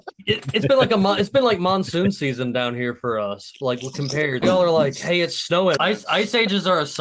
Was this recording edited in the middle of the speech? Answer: yes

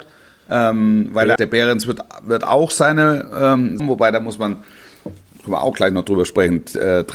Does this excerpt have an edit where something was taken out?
yes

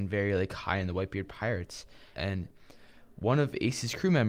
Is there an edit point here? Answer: yes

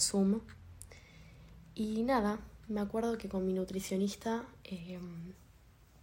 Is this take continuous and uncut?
yes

